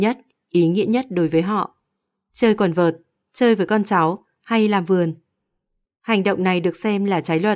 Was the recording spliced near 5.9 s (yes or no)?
yes